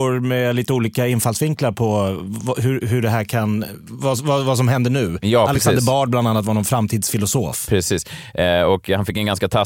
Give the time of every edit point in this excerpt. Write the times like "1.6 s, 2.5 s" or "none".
none